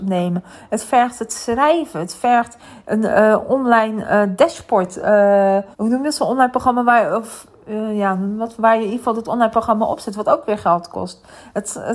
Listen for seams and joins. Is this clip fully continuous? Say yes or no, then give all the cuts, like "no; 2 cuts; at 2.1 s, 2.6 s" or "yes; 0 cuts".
no; 1 cut; at 5.7 s